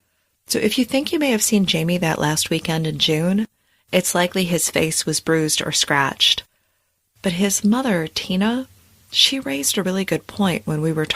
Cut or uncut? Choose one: uncut